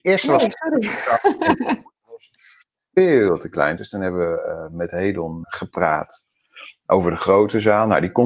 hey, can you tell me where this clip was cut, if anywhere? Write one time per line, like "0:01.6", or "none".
0:03.8
0:05.4